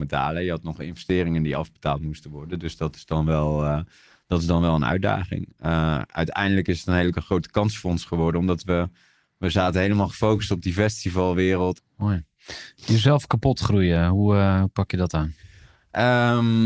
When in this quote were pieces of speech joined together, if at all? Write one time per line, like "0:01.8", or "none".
0:11.8